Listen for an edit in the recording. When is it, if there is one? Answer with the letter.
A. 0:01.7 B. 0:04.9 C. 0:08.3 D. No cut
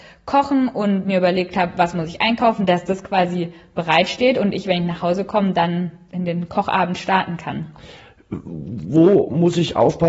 D